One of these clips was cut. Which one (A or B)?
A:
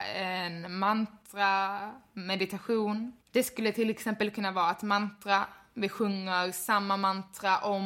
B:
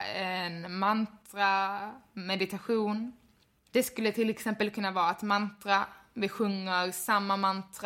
A